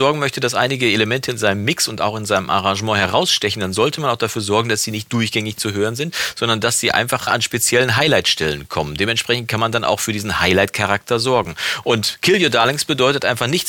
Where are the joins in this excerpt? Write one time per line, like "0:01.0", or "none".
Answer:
0:07.3